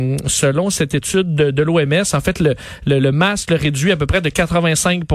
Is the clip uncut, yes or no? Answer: yes